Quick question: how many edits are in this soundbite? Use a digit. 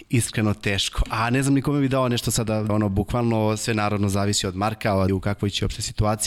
2